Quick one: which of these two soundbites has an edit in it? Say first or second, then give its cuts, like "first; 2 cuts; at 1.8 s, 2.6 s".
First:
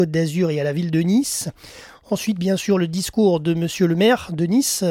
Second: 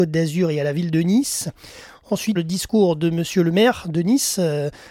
second; 1 cut; at 2.4 s